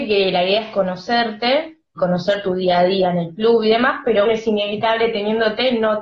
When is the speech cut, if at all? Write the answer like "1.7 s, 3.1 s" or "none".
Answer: 2.0 s, 4.2 s